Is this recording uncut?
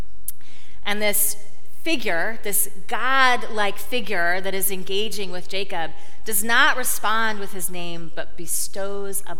yes; 0 cuts

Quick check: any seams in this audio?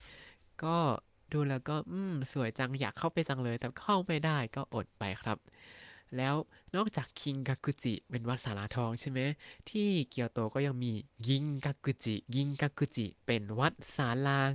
yes; 1 cut; at 12.3 s

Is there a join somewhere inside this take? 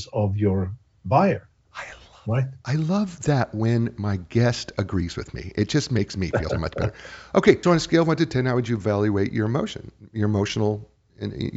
yes; 2 cuts; at 6.5 s, 7.6 s

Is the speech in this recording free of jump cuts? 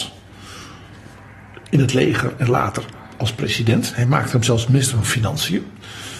yes; 0 cuts

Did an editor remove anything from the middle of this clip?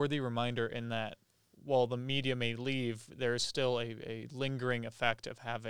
no; 0 cuts

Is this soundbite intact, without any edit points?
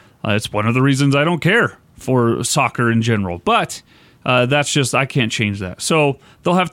yes; 0 cuts

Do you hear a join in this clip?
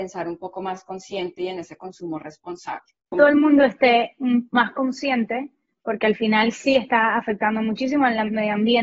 yes; 1 cut; at 3.1 s

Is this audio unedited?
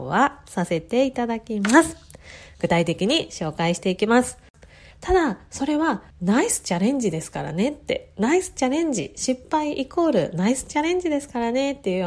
no; 2 cuts; at 4.9 s, 6.1 s

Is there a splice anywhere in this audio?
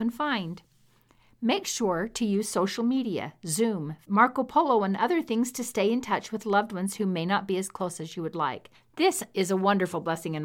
yes; 1 cut; at 4.0 s

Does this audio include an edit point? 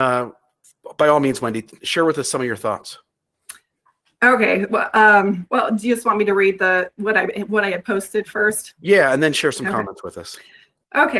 no; 0 cuts

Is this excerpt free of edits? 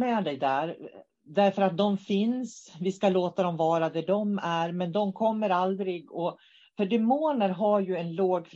yes; 0 cuts

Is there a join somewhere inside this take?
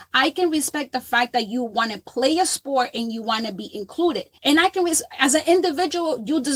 yes; 1 cut; at 4.4 s

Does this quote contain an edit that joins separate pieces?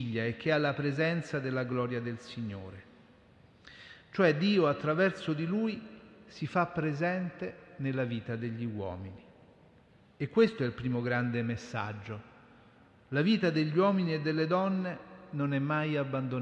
no; 0 cuts

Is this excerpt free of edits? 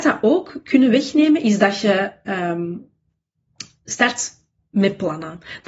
yes; 0 cuts

